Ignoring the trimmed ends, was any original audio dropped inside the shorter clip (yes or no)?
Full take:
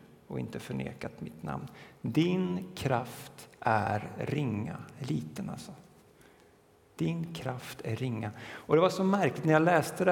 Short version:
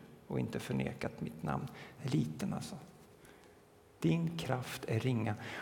yes